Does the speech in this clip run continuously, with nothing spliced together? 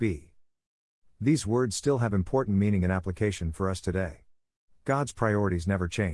yes; 0 cuts

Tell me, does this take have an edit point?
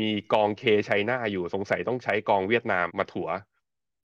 yes; 1 cut; at 2.9 s

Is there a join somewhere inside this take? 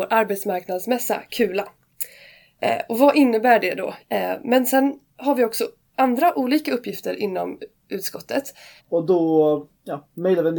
yes; 2 cuts; at 4.0 s, 8.8 s

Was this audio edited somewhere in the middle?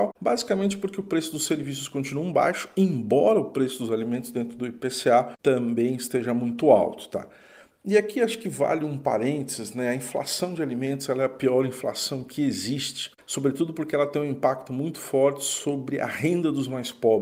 no; 0 cuts

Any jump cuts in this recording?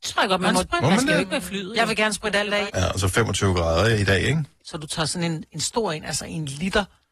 yes; 2 cuts; at 2.7 s, 4.6 s

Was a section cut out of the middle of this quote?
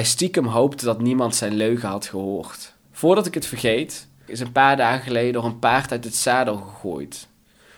yes; 2 cuts; at 2.8 s, 4.3 s

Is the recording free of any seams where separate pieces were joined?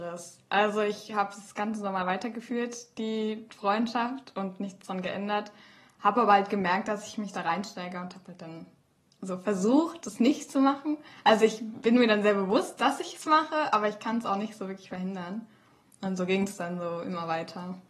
yes; 0 cuts

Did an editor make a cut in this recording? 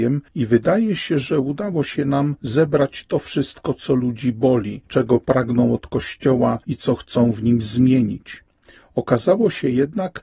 no; 0 cuts

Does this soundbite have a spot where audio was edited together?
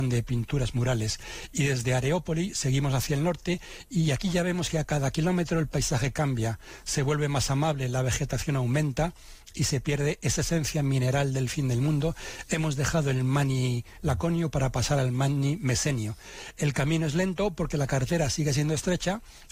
no; 0 cuts

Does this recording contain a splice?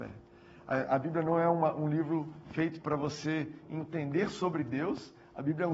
no; 0 cuts

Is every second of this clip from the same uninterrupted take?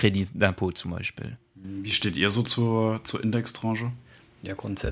yes; 0 cuts

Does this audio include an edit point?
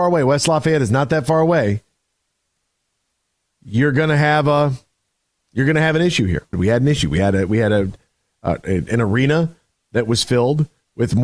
yes; 1 cut; at 6.5 s

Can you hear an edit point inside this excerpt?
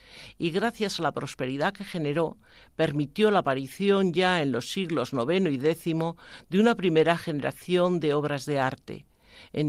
no; 0 cuts

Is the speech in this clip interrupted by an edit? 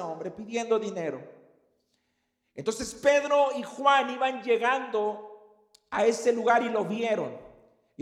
no; 0 cuts

